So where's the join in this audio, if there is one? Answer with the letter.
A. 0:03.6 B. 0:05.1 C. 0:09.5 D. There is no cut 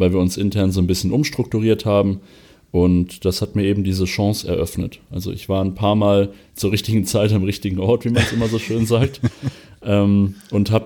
D